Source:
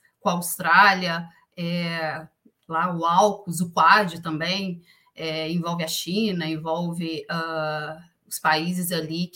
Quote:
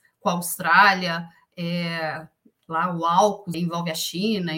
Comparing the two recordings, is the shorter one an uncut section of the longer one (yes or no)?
no